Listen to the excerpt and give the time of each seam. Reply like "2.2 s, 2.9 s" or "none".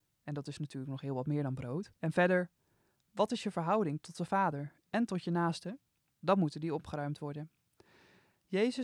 2.0 s, 6.1 s